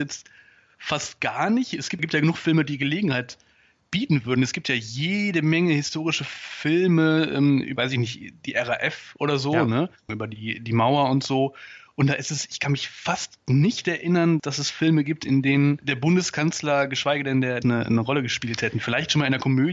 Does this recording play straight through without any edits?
no; 1 cut; at 17.6 s

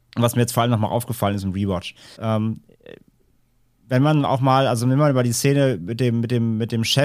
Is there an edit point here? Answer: yes; 1 cut; at 2.1 s

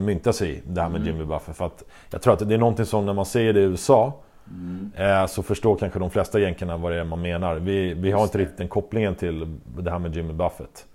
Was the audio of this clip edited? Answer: no; 0 cuts

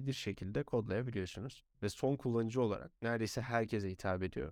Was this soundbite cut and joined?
yes; 2 cuts; at 1.7 s, 3.0 s

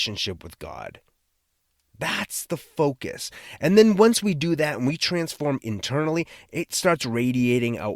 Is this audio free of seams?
yes; 0 cuts

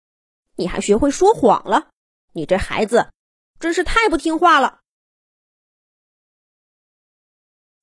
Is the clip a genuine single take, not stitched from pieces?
no; 1 cut; at 2.2 s

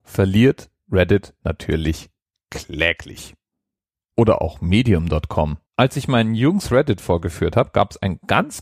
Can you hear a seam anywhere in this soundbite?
yes; 2 cuts; at 4.1 s, 5.7 s

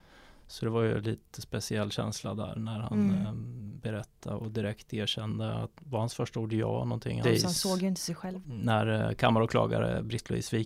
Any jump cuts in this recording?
yes; 2 cuts; at 7.2 s, 8.4 s

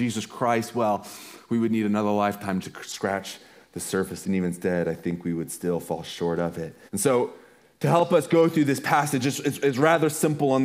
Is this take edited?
yes; 2 cuts; at 2.6 s, 6.9 s

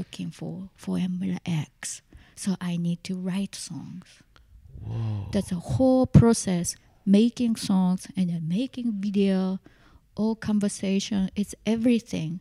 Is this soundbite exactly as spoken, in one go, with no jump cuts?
yes; 0 cuts

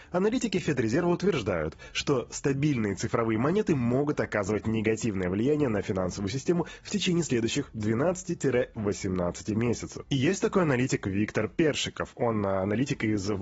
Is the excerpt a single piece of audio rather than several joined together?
yes; 0 cuts

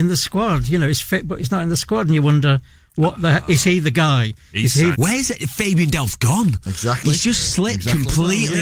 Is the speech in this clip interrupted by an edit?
yes; 1 cut; at 4.9 s

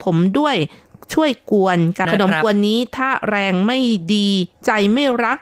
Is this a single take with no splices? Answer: no; 1 cut; at 2.0 s

